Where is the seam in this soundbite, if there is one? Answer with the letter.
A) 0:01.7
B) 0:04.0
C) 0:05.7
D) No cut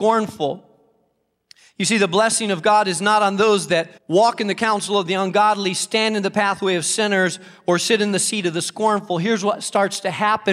B